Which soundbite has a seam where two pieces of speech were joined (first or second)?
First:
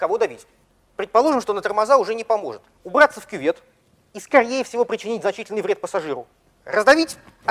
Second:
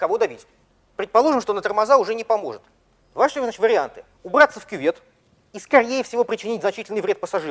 first